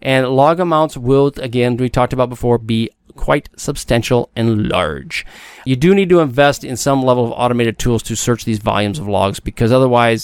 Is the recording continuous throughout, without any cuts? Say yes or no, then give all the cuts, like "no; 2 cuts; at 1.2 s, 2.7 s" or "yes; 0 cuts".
yes; 0 cuts